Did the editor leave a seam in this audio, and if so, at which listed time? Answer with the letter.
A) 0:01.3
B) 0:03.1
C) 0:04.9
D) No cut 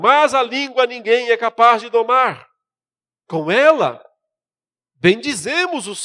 B